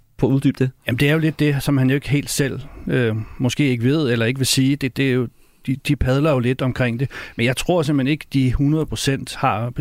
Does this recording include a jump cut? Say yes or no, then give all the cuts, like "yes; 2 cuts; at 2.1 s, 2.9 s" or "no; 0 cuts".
no; 0 cuts